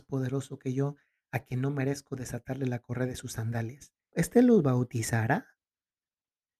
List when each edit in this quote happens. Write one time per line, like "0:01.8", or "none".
0:04.1